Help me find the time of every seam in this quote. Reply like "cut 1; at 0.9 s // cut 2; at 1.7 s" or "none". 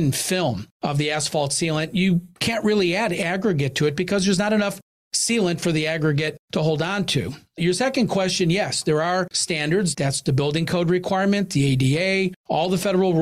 cut 1; at 9.9 s